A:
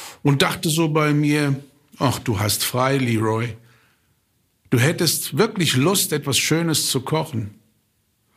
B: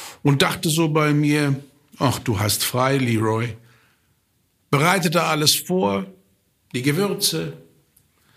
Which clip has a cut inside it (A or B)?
B